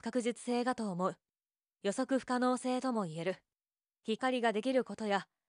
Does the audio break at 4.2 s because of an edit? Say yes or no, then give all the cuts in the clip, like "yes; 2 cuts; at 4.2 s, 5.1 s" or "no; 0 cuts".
yes; 1 cut; at 4.2 s